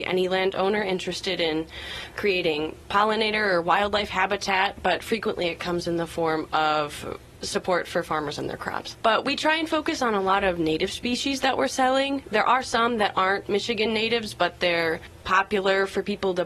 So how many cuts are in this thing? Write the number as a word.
two